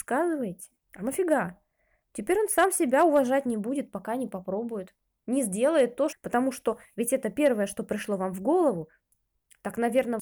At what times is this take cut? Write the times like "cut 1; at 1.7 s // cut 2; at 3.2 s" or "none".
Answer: cut 1; at 6.1 s